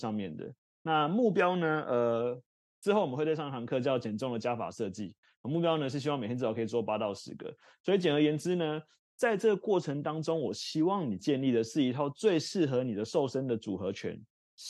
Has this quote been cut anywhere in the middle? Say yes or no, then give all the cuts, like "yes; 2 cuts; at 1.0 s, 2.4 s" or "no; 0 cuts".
no; 0 cuts